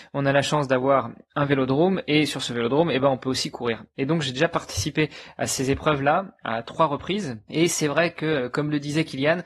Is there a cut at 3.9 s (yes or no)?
no